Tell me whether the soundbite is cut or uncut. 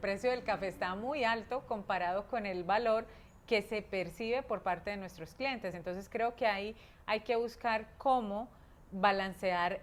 uncut